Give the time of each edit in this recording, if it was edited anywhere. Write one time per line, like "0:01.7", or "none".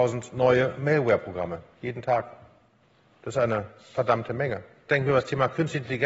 0:04.9